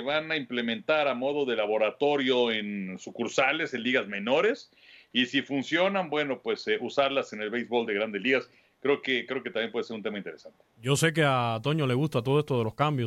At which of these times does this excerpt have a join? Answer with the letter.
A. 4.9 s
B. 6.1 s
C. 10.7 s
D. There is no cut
D